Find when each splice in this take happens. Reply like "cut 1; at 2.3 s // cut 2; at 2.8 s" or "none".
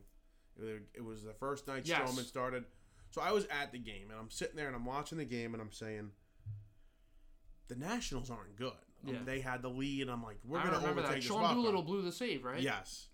cut 1; at 9.2 s